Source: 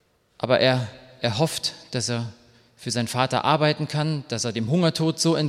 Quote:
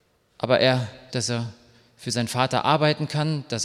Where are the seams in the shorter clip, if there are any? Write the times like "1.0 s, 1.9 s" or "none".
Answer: 1.1 s

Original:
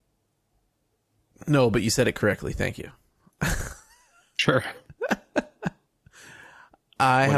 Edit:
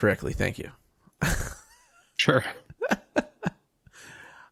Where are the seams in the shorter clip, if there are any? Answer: none

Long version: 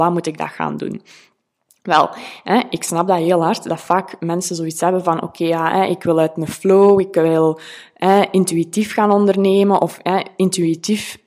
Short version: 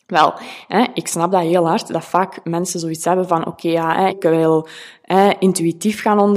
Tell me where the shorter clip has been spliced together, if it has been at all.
4.1 s

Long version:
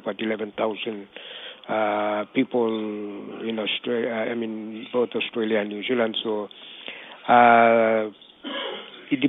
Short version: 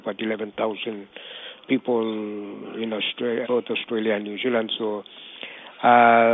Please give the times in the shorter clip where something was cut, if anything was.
1.6 s, 3.4 s

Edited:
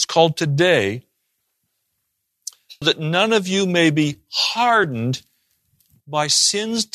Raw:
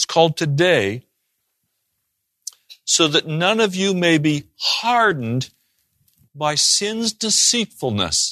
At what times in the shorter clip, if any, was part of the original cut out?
2.8 s

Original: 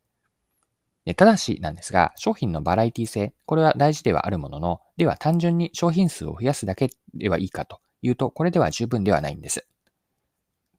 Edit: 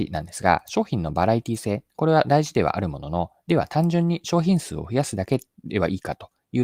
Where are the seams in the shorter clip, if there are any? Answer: none

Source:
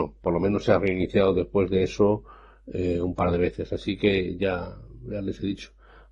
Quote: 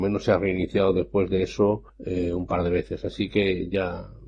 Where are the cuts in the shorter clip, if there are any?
1.9 s

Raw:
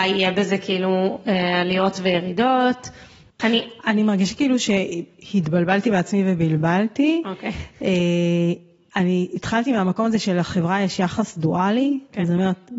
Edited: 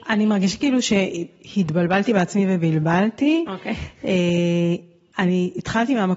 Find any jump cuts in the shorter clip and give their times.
none

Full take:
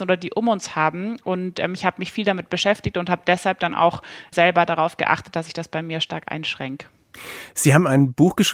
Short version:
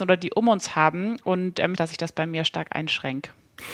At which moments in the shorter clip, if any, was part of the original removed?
1.8 s

